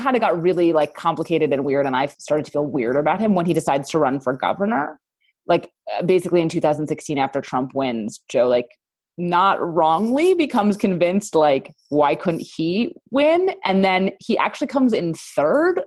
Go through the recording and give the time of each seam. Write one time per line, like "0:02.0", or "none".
none